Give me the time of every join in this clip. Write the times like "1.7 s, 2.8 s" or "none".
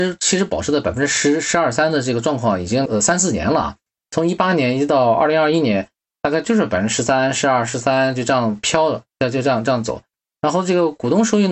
none